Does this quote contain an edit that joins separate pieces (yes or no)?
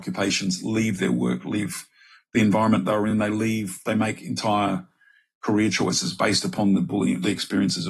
no